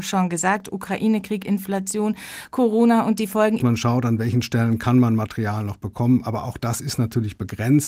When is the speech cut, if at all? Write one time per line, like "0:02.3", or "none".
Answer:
0:03.6